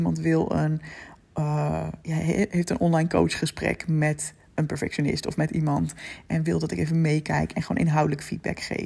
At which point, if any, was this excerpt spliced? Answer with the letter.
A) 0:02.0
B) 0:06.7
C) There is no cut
A